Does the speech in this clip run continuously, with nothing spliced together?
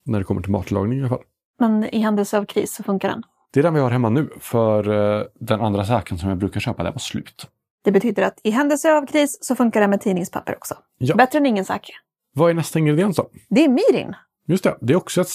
yes; 0 cuts

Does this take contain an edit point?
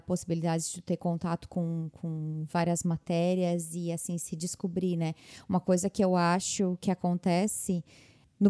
no; 0 cuts

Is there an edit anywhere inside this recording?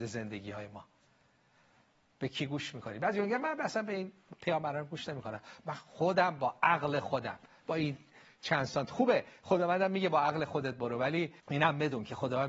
yes; 1 cut; at 11.4 s

